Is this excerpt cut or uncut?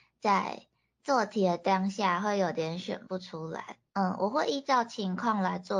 cut